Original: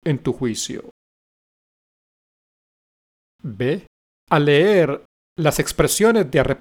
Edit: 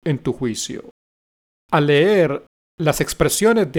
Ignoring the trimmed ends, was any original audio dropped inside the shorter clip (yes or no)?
yes